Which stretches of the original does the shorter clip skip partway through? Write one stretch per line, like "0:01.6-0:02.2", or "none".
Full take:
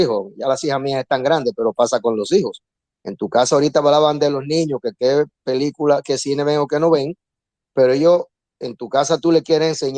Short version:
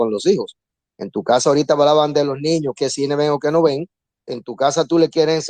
0:04.8-0:06.0
0:07.5-0:08.5